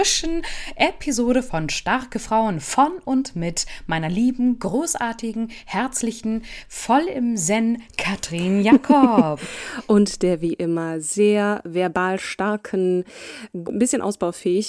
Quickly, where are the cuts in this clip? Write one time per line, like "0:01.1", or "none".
0:13.7